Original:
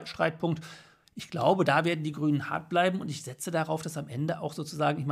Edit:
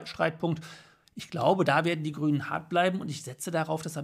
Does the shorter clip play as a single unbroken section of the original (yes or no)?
yes